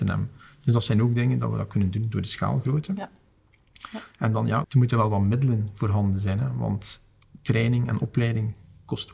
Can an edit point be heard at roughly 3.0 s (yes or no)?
no